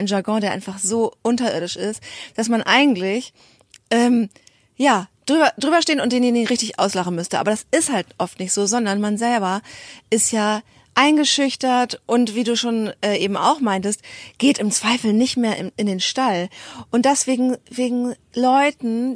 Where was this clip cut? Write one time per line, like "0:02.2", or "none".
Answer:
none